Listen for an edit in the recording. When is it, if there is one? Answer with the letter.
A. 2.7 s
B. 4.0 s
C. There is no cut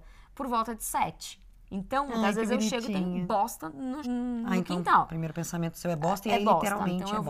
B